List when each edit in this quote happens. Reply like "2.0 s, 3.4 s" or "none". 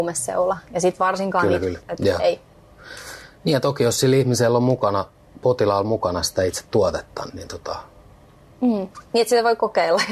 1.8 s, 7.3 s